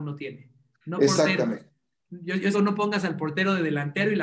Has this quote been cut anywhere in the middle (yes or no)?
yes